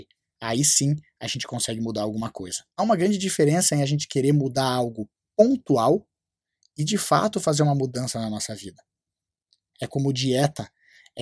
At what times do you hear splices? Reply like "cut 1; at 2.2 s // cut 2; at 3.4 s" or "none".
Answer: cut 1; at 2.7 s // cut 2; at 9.7 s